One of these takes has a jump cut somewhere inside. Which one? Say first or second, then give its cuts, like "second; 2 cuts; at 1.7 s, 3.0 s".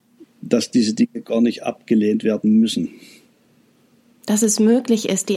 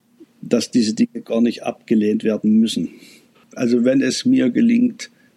second; 1 cut; at 3.3 s